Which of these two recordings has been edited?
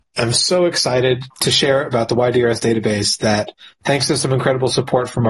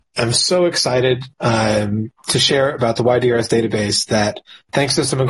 first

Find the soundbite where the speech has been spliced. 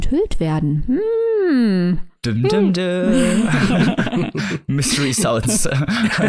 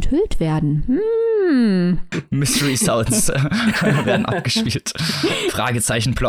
second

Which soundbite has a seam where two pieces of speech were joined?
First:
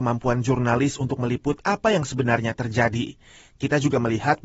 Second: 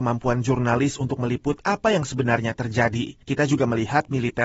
second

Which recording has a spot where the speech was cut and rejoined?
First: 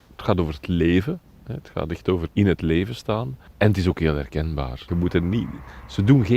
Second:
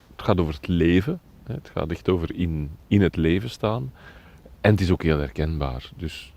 first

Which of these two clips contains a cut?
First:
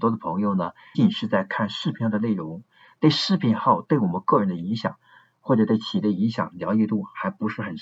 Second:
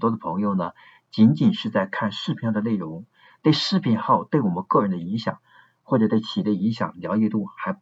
first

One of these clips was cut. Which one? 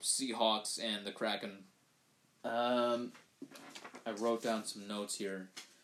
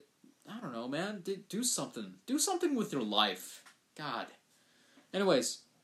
first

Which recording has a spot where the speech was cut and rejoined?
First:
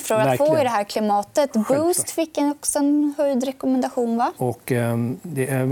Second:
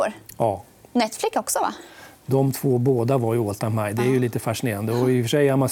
first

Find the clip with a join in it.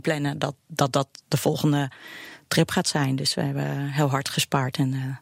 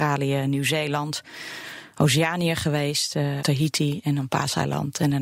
second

